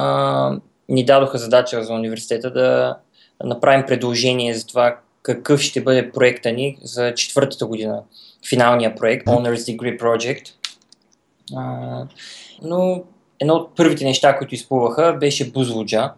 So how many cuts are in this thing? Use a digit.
2